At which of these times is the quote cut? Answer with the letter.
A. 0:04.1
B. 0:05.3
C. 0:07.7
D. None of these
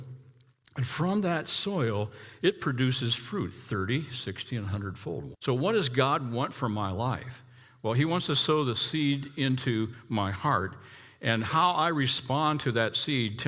B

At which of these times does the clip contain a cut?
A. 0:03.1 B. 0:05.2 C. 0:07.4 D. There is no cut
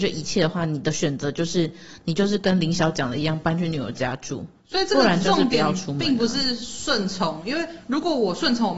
D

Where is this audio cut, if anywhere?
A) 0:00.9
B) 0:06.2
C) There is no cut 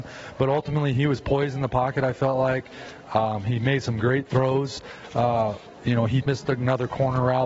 B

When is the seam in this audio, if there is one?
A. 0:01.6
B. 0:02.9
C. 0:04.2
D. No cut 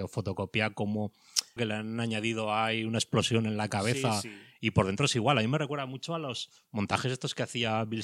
A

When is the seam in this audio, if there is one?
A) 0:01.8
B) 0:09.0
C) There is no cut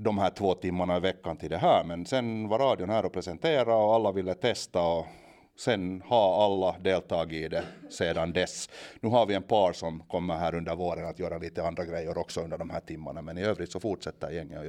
C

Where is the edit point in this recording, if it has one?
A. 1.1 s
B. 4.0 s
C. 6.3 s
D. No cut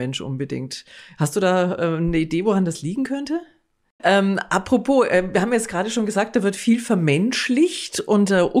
B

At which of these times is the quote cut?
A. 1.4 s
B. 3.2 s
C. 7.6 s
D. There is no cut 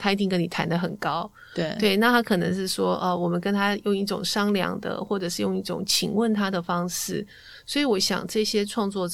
D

